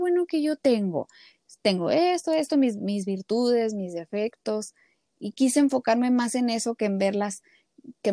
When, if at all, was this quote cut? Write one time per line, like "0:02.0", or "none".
none

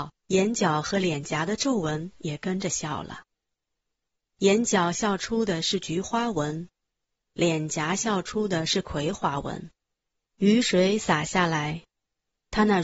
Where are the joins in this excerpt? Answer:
none

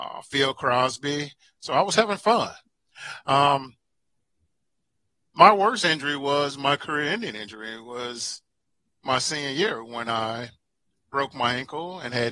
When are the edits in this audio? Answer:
none

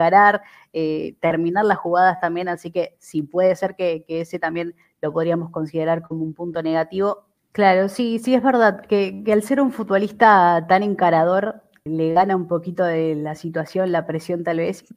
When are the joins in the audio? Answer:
0:07.4
0:11.9

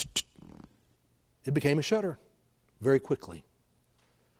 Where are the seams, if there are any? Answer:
none

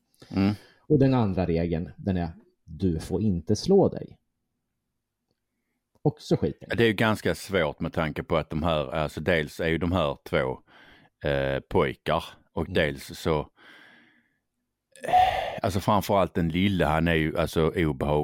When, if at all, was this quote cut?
none

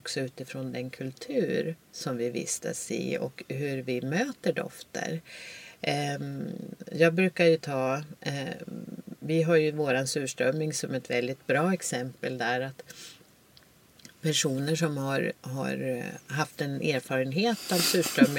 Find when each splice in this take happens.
none

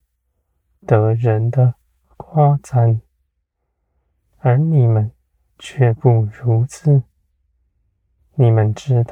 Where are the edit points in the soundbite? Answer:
none

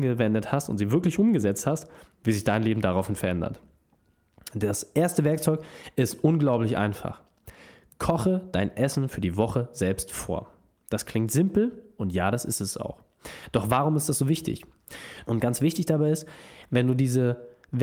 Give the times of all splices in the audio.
0:15.2

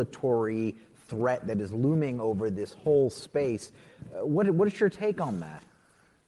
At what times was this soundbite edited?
none

